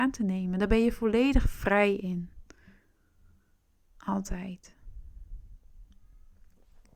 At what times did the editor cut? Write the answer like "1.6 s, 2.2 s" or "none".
none